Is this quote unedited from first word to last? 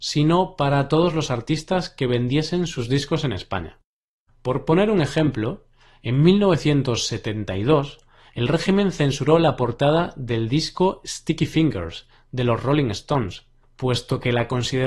yes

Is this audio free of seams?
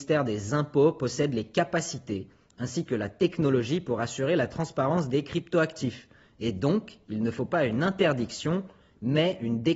yes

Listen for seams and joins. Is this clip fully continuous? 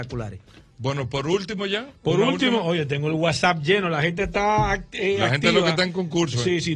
yes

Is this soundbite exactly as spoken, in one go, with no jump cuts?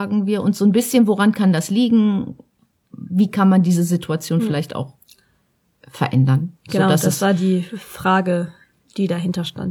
yes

